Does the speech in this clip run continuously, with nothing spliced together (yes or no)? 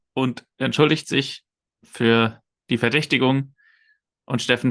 yes